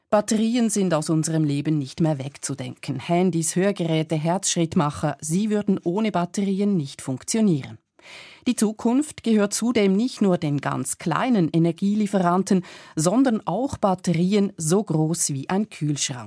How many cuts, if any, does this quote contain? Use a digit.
0